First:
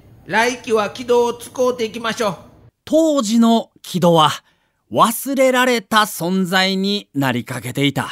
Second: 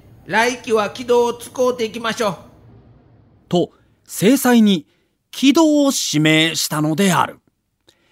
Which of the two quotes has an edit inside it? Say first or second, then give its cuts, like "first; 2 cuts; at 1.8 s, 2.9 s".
first; 1 cut; at 2.7 s